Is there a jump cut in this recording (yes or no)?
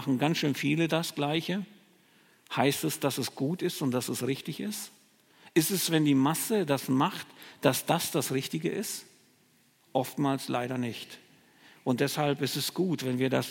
no